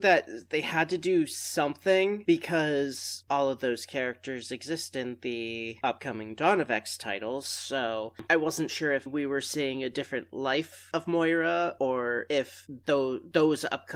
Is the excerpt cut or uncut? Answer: cut